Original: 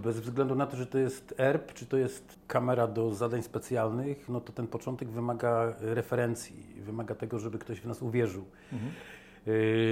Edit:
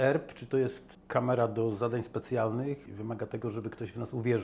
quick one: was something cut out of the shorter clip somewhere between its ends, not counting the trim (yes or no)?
yes